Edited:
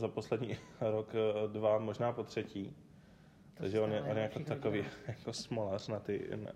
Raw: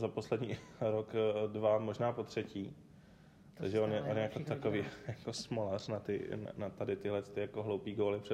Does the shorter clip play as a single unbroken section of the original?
yes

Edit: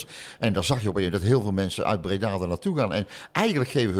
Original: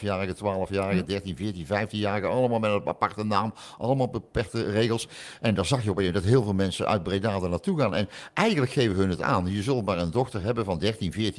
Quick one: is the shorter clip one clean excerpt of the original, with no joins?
yes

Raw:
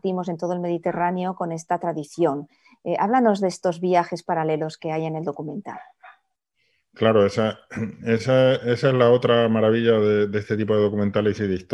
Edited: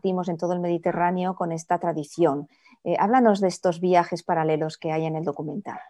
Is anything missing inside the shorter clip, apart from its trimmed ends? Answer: no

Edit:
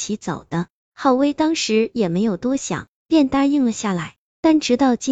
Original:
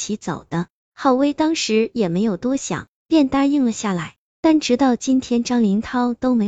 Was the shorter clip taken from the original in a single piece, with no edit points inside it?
yes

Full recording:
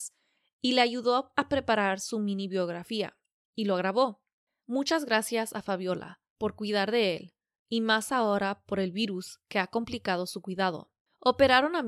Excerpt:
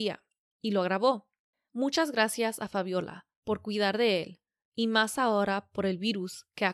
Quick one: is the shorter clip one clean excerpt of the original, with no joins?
yes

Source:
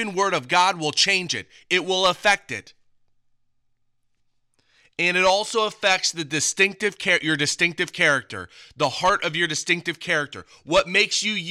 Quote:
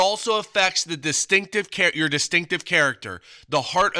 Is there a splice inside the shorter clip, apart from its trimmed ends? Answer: no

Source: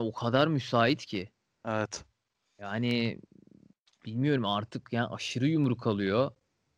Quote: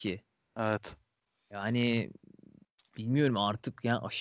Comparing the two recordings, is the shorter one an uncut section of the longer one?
yes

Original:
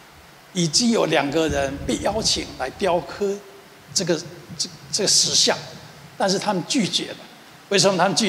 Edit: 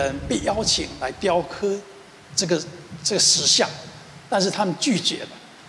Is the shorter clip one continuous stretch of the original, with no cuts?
no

